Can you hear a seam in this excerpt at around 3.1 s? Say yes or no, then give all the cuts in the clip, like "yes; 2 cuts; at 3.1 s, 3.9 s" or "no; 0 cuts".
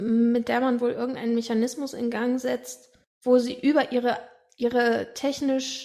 yes; 1 cut; at 3.1 s